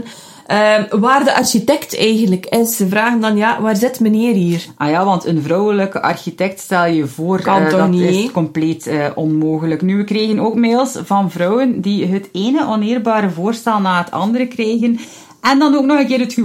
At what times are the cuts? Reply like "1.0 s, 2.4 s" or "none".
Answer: none